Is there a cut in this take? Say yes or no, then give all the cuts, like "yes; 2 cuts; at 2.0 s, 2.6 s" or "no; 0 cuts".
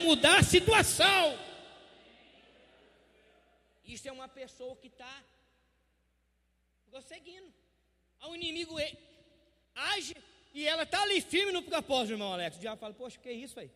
yes; 1 cut; at 8.1 s